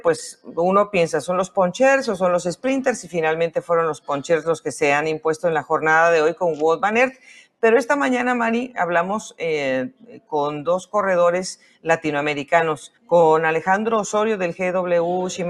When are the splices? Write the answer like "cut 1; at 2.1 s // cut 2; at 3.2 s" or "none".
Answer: cut 1; at 13.0 s